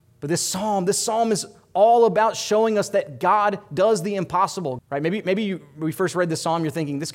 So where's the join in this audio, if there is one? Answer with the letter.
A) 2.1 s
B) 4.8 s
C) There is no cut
B